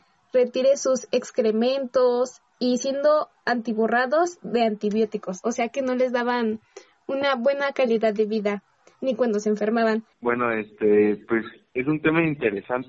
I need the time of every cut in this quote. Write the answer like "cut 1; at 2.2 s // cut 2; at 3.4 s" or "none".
cut 1; at 10.1 s